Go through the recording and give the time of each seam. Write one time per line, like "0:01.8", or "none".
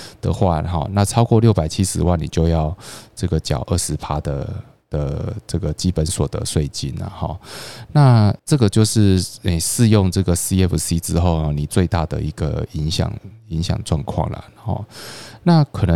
0:08.4